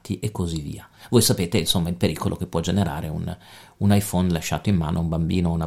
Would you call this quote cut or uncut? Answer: uncut